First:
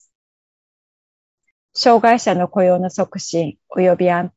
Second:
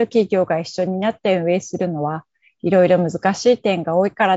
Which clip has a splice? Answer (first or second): first